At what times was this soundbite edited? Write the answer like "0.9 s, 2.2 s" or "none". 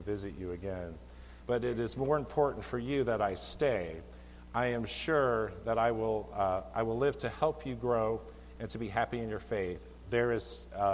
1.4 s, 10.0 s